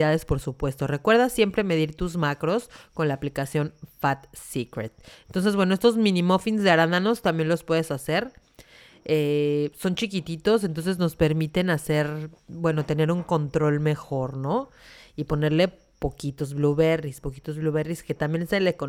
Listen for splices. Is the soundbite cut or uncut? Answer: uncut